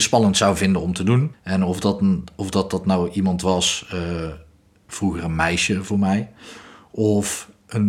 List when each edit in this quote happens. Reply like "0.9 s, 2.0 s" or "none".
1.3 s